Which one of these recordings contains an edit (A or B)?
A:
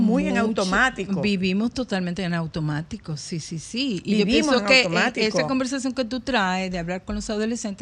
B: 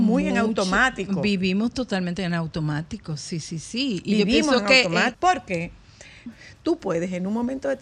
B